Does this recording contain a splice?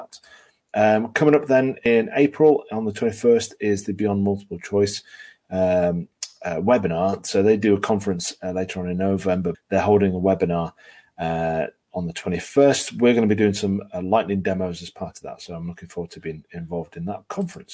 yes; 1 cut; at 9.5 s

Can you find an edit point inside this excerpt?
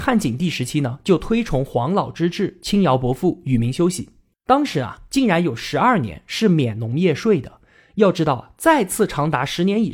no; 0 cuts

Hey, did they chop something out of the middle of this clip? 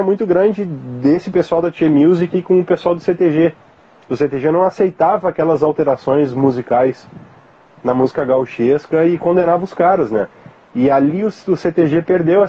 no; 0 cuts

